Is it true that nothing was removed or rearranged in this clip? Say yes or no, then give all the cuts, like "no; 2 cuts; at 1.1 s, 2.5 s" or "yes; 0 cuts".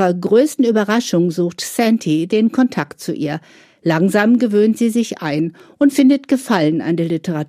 no; 1 cut; at 2.3 s